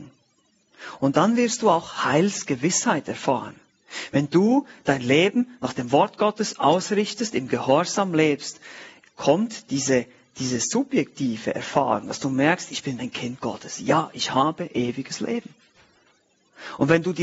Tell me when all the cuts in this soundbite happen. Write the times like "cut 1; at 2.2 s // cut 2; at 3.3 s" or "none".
cut 1; at 13.0 s